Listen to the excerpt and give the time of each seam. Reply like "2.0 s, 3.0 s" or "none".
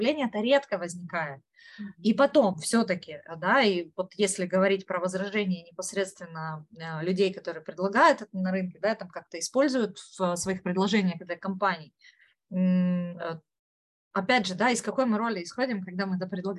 none